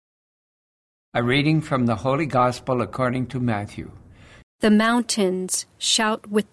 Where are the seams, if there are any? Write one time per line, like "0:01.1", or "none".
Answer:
0:01.0
0:04.4